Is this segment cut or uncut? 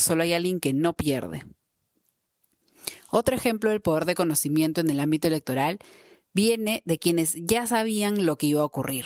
uncut